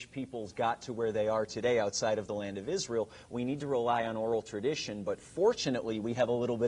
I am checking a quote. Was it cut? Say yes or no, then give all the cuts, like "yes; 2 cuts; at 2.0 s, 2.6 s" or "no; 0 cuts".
no; 0 cuts